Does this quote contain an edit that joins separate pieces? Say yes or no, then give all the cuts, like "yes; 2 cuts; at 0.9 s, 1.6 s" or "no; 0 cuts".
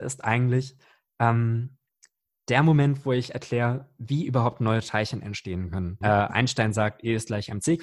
yes; 1 cut; at 6.0 s